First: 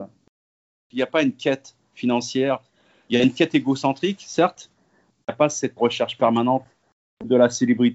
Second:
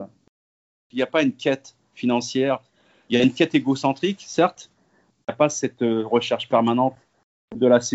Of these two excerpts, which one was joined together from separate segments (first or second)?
first